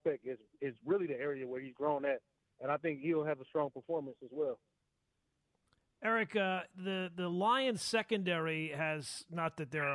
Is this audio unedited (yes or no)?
yes